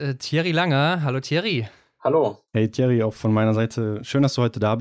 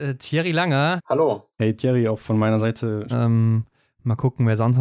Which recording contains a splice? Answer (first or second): second